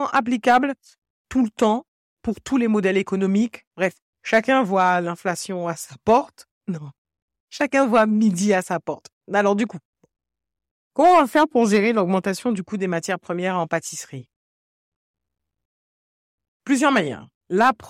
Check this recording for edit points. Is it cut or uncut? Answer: uncut